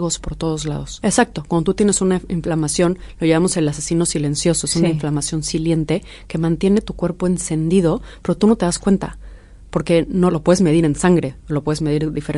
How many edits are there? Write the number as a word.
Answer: two